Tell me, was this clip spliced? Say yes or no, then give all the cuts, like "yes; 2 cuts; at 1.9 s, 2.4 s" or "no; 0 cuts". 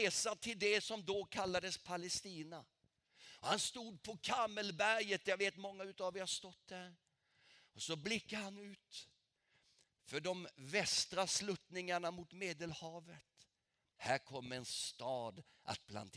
yes; 1 cut; at 14.0 s